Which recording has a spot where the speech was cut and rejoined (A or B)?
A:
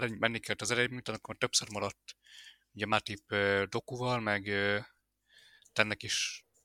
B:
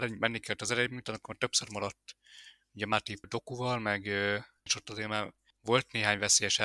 B